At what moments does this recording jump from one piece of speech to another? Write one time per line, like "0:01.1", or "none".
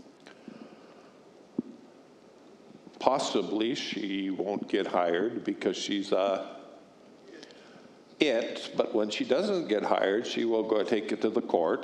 none